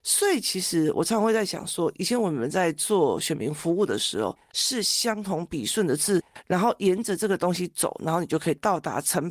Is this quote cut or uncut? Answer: cut